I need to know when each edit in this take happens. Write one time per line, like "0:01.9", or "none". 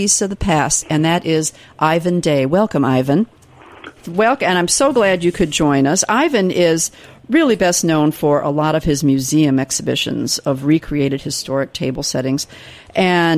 0:04.0